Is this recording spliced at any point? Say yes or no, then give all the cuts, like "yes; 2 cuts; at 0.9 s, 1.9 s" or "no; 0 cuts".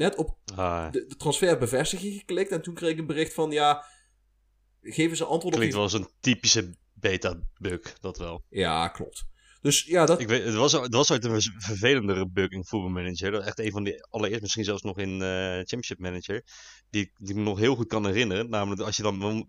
no; 0 cuts